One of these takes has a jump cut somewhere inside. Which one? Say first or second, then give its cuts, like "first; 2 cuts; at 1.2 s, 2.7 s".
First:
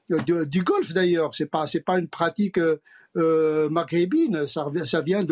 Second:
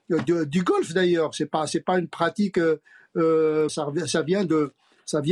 second; 1 cut; at 3.7 s